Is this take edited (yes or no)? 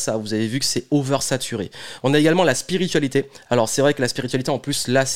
no